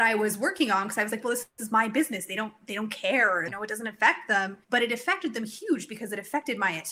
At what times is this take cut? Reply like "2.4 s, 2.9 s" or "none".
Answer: 3.5 s, 4.6 s